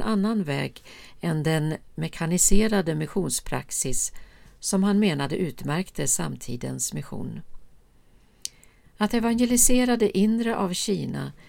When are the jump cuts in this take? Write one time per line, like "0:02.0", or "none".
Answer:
0:08.8